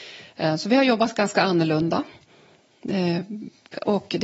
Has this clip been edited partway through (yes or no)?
no